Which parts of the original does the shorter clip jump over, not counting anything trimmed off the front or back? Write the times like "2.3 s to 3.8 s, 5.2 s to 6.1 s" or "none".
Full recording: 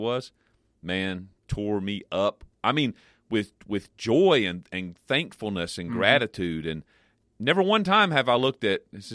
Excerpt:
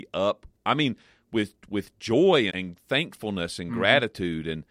4.5 s to 4.7 s